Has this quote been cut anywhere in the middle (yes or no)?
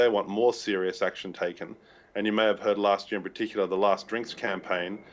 no